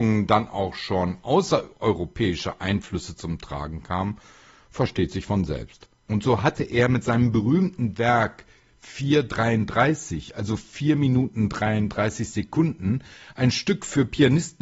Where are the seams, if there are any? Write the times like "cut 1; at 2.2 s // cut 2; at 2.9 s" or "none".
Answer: cut 1; at 6.1 s